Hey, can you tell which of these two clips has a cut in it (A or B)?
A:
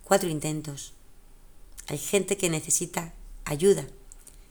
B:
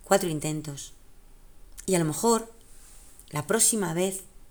B